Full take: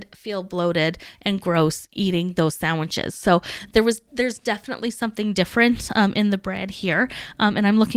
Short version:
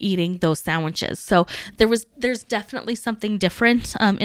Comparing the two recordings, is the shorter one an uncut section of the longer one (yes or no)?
yes